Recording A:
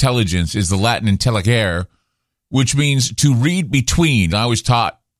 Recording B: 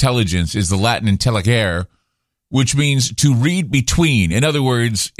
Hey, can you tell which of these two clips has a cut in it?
A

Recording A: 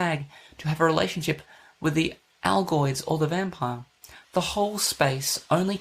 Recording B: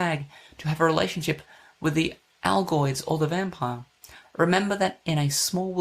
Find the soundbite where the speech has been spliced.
A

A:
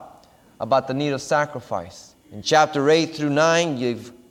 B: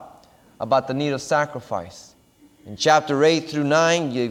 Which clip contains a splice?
A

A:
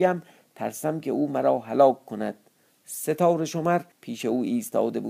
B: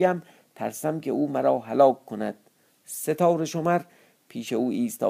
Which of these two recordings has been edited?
A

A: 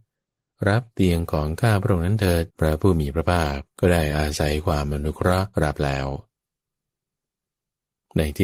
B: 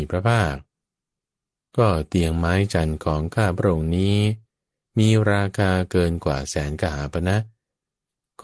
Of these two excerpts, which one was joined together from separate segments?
A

